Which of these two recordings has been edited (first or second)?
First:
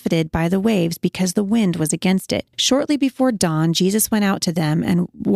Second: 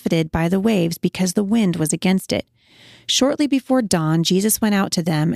first